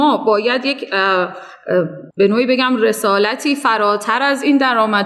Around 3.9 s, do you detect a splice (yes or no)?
no